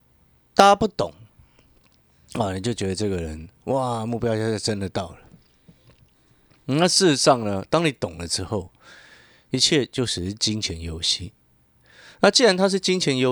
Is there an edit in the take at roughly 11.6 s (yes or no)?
no